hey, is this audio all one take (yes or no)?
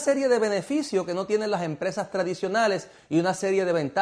yes